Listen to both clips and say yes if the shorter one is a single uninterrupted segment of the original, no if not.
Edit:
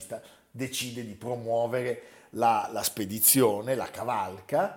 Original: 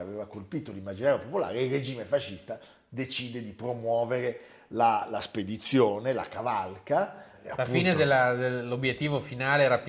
yes